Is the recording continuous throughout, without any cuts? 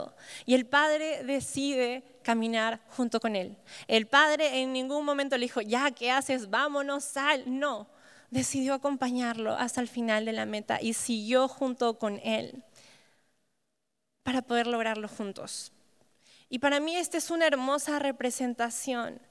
yes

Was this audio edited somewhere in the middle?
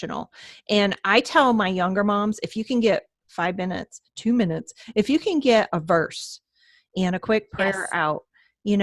no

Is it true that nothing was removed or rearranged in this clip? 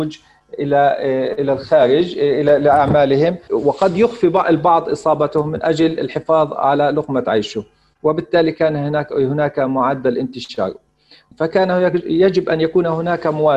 no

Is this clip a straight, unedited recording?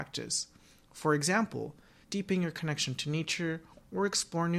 no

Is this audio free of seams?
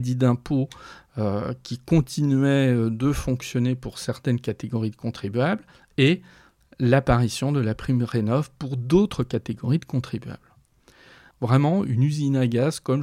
no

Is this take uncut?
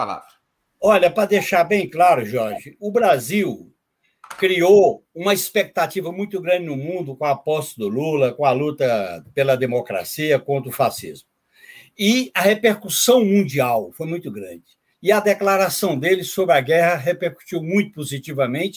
yes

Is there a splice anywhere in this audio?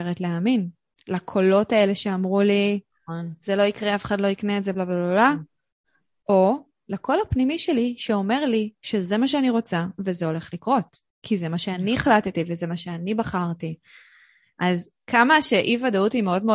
no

